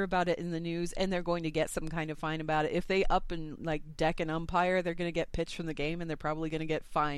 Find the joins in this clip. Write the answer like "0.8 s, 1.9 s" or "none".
none